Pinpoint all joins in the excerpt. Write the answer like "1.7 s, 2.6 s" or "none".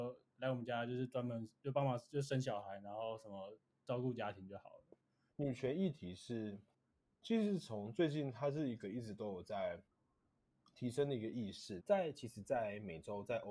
5.3 s, 11.8 s